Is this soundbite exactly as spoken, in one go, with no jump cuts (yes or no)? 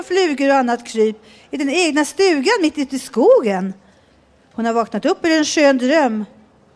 yes